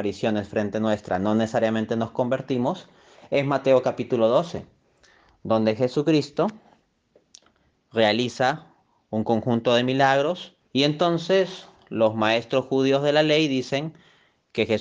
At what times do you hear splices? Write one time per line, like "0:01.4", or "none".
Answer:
0:10.7